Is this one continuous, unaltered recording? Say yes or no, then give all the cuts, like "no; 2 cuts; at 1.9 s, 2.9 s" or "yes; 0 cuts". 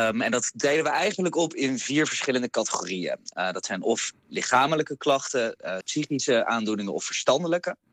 no; 1 cut; at 5.8 s